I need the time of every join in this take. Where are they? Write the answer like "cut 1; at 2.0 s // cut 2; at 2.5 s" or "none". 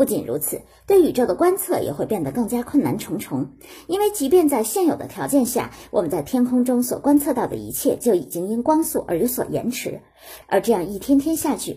cut 1; at 10.4 s